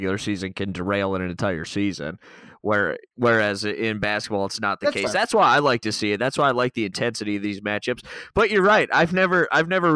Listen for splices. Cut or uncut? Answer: uncut